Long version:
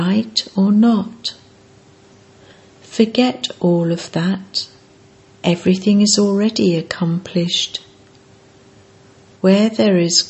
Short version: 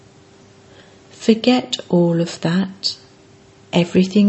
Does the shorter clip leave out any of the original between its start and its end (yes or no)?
no